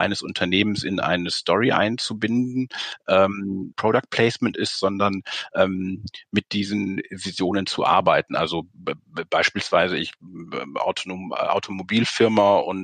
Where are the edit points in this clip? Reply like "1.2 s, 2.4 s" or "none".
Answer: 3.7 s